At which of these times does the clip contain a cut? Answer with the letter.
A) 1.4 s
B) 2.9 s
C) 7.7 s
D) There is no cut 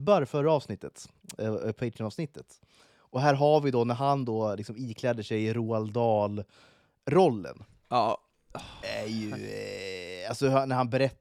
D